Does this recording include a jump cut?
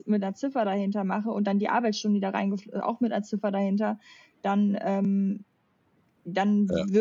no; 0 cuts

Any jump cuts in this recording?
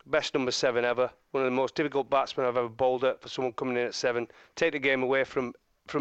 no; 0 cuts

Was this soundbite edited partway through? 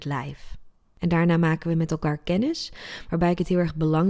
no; 0 cuts

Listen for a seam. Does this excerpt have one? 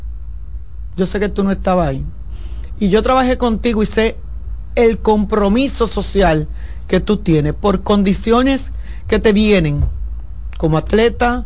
no; 0 cuts

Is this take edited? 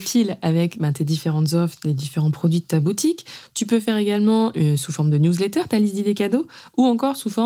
yes; 1 cut; at 4.5 s

